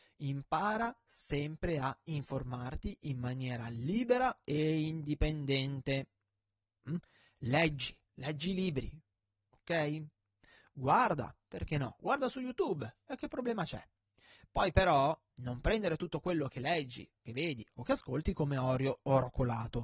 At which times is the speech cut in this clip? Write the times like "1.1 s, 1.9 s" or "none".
none